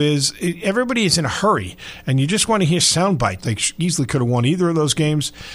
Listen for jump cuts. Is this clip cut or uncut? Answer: cut